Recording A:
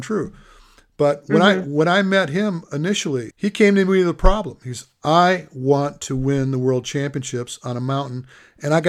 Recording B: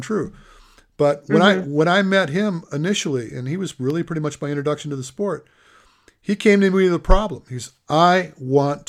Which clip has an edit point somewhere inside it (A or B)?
A